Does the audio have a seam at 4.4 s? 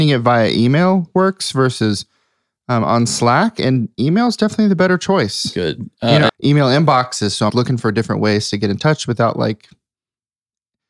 no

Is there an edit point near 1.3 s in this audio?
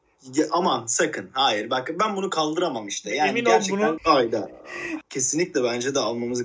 no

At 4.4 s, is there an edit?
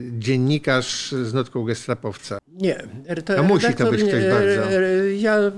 no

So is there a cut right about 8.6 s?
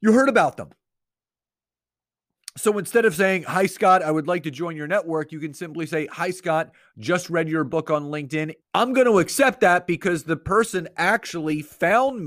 yes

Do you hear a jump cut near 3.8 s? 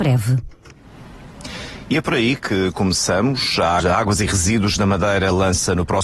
yes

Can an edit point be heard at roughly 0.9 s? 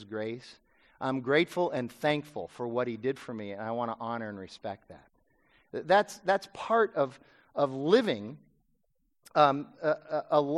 no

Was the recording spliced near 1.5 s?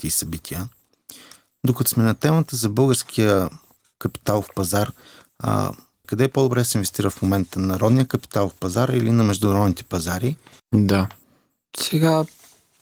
no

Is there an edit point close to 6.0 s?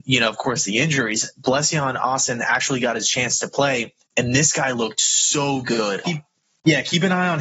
yes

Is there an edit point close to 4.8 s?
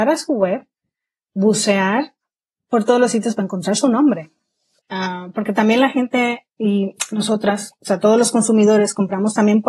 yes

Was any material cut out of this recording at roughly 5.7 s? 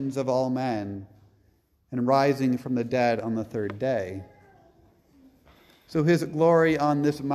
no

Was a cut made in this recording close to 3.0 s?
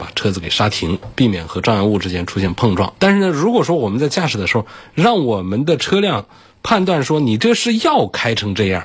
no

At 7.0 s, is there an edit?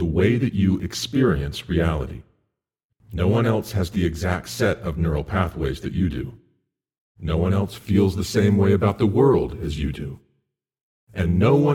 no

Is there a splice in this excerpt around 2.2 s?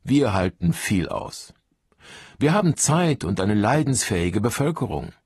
no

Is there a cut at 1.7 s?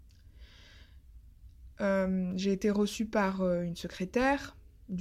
yes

